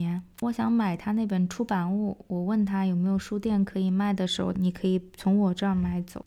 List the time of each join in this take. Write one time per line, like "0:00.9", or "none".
0:04.5